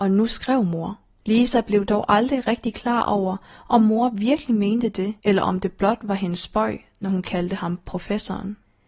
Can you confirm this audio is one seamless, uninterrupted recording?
no; 2 cuts; at 1.2 s, 5.2 s

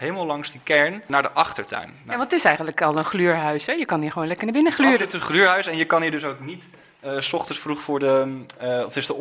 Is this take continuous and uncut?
yes; 0 cuts

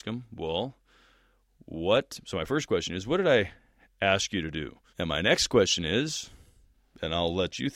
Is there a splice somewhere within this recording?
yes; 1 cut; at 4.9 s

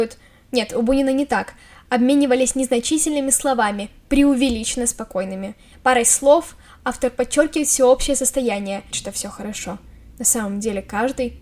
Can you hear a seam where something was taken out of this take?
yes; 2 cuts; at 5.7 s, 8.9 s

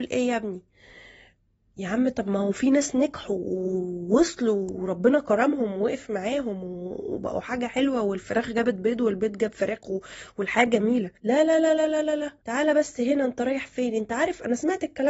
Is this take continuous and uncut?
no; 2 cuts; at 11.2 s, 12.4 s

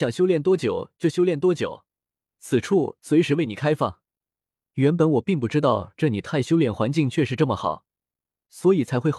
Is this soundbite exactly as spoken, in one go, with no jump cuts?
no; 1 cut; at 4.2 s

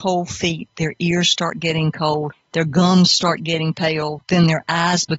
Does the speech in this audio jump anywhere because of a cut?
no; 0 cuts

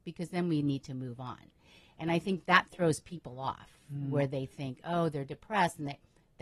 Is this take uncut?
yes; 0 cuts

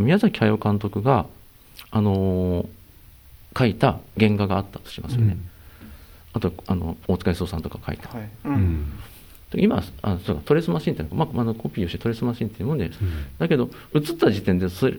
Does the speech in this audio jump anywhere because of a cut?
yes; 3 cuts; at 8.4 s, 11.3 s, 12.9 s

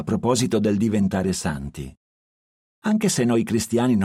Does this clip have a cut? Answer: yes; 1 cut; at 2.6 s

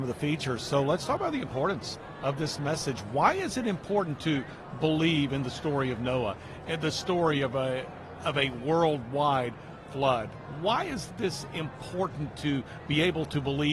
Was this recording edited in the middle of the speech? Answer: no; 0 cuts

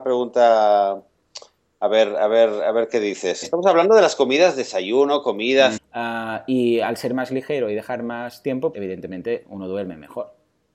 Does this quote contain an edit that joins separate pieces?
yes; 3 cuts; at 3.4 s, 5.8 s, 8.7 s

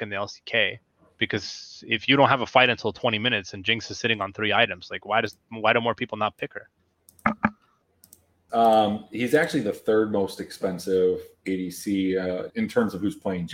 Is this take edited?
yes; 2 cuts; at 8.5 s, 12.5 s

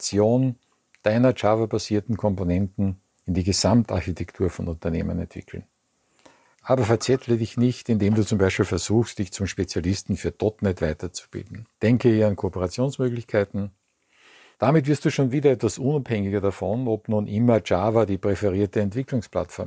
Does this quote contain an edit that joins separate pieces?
yes; 3 cuts; at 6.5 s, 11.7 s, 14.5 s

